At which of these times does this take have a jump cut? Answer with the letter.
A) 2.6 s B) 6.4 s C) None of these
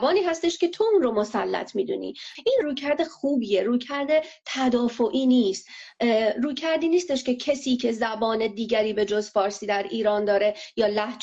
A